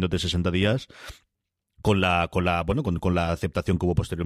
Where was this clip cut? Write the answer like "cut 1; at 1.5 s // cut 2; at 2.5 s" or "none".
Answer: none